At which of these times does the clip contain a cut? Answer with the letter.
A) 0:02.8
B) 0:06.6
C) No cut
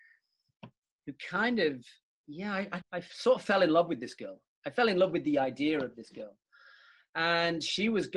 A